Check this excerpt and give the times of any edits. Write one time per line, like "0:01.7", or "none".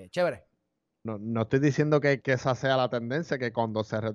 0:01.0
0:02.2